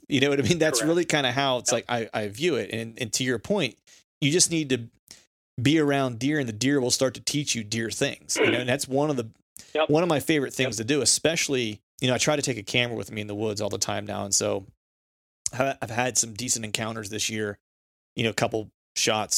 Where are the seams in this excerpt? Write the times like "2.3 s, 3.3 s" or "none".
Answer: 11.9 s